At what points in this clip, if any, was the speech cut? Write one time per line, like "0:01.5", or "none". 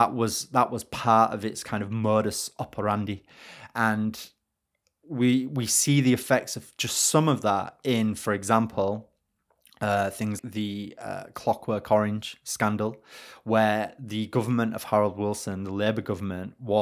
0:10.4